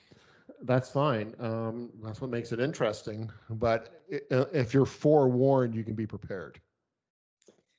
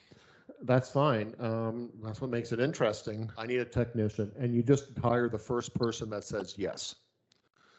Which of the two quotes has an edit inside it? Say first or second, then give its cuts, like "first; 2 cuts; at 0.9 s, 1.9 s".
second; 2 cuts; at 3.3 s, 5.0 s